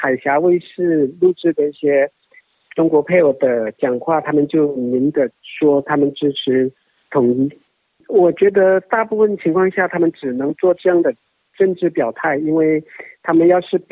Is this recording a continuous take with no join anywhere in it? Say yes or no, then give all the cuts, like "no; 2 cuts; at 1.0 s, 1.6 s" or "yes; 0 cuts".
yes; 0 cuts